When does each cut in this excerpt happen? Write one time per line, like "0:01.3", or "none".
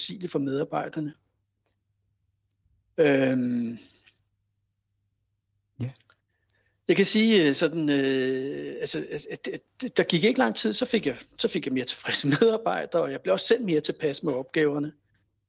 none